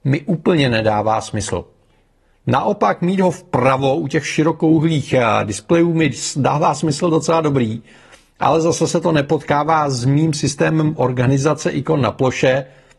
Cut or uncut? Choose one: uncut